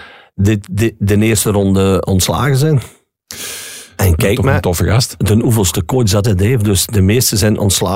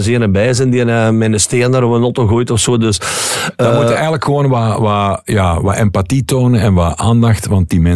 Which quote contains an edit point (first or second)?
first